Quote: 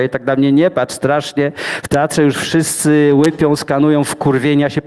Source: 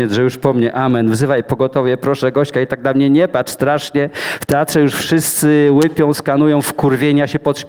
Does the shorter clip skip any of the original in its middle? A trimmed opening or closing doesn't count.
no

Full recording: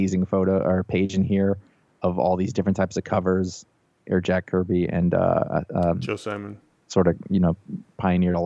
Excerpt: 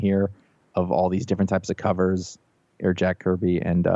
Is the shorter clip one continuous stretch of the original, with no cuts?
yes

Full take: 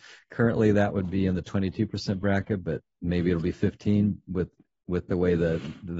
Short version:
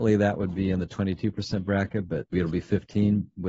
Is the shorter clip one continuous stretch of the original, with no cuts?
no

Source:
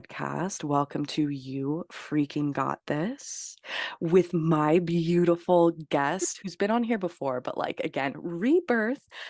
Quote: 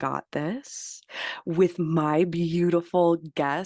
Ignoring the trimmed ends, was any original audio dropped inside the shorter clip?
no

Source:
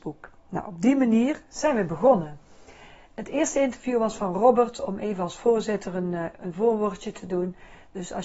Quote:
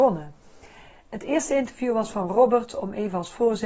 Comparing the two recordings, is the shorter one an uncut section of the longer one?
yes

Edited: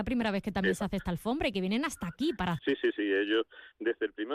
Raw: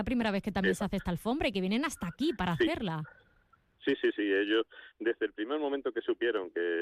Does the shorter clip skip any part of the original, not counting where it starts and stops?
yes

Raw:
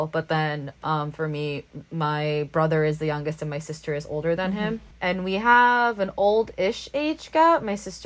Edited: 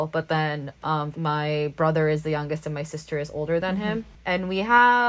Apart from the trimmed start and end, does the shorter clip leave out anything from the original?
yes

